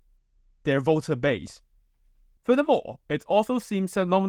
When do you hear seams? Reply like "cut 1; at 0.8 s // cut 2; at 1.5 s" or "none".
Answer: cut 1; at 2.4 s